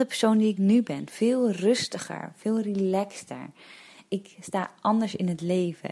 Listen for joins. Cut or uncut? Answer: uncut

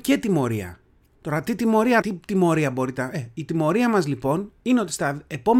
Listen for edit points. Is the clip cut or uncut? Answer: cut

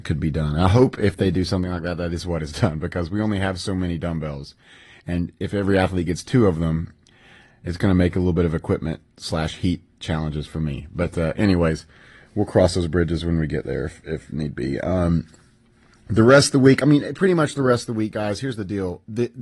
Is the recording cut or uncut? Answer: uncut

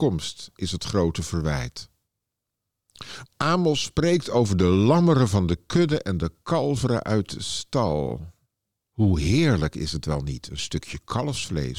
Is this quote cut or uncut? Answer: cut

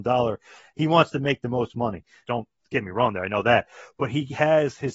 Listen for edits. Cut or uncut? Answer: cut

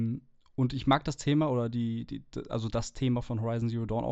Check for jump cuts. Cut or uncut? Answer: uncut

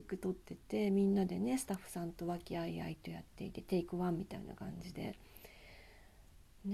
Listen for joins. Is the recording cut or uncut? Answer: uncut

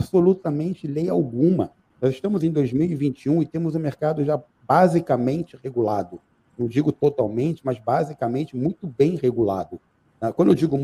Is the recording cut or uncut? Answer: uncut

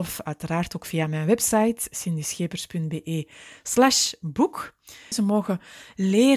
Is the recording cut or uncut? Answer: cut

